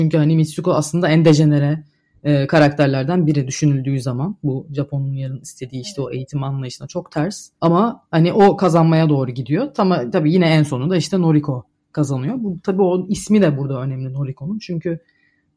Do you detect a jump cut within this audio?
no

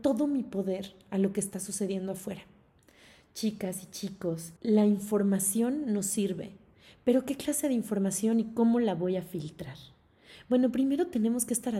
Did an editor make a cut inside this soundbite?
yes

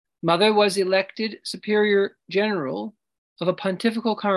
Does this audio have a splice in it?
no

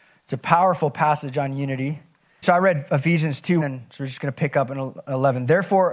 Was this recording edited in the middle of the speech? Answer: yes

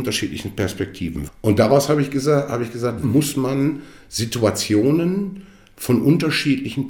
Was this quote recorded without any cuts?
no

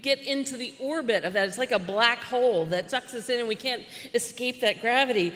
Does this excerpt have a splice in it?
yes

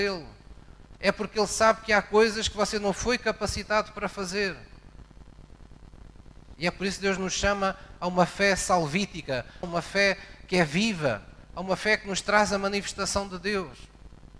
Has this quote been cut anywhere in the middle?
yes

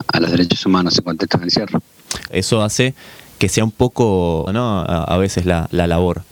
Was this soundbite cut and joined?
yes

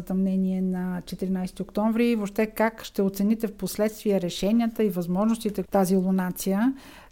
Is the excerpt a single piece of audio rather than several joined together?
no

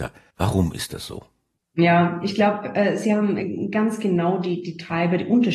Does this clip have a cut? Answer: no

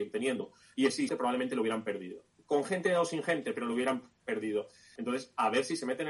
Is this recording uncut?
no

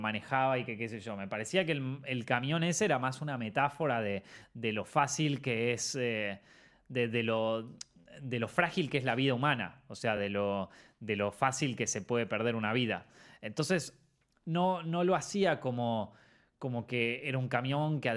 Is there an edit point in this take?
no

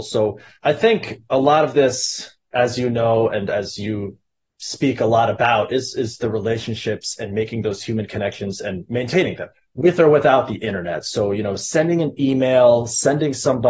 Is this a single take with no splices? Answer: yes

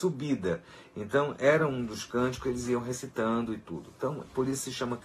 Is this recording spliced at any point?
no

